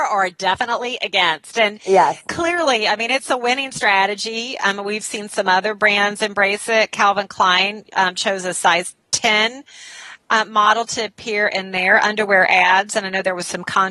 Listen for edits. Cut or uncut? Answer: uncut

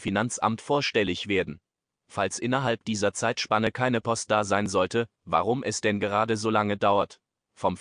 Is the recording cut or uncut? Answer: cut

